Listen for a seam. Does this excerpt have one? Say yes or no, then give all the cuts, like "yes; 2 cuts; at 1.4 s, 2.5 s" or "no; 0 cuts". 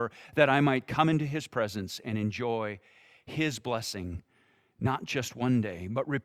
no; 0 cuts